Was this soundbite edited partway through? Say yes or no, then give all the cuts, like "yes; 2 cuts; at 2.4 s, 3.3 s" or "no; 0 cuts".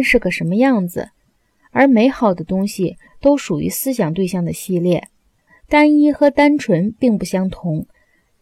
yes; 2 cuts; at 3.1 s, 5.5 s